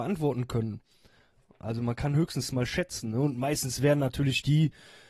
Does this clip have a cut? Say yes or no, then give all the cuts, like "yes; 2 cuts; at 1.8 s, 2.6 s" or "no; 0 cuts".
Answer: no; 0 cuts